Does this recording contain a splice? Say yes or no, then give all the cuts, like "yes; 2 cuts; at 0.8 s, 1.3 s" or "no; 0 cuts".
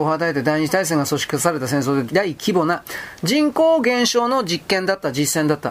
yes; 1 cut; at 2.1 s